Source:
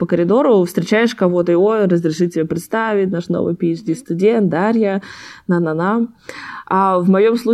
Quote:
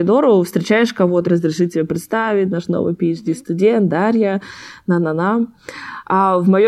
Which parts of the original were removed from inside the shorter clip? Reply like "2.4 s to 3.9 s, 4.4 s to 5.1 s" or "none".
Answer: 1.5 s to 1.9 s